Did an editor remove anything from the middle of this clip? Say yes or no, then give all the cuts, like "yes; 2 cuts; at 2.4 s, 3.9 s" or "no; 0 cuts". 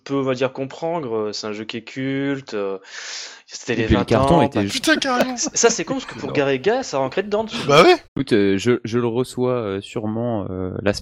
yes; 2 cuts; at 4.7 s, 8.1 s